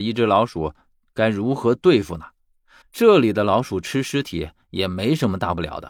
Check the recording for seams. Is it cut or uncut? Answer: cut